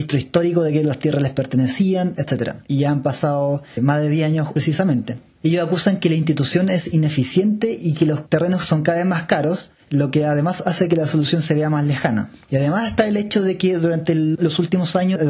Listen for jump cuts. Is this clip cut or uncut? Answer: cut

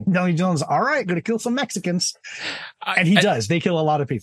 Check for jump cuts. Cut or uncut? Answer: uncut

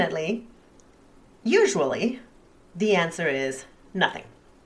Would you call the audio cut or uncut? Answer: uncut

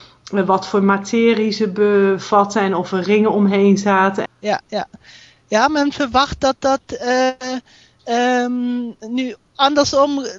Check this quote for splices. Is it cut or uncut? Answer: cut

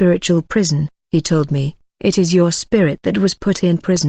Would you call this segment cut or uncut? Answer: uncut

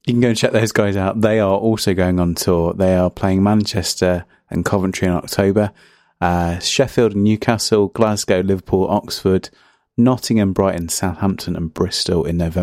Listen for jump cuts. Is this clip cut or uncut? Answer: uncut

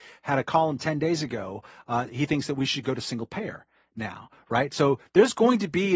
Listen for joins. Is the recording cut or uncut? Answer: cut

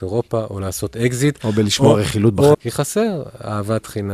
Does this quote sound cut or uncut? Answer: cut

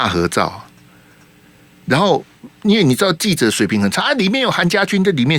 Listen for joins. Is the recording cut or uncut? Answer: uncut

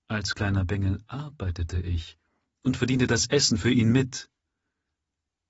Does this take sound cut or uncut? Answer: uncut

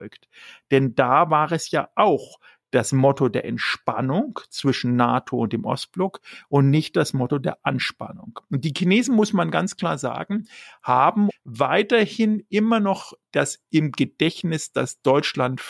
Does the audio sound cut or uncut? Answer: cut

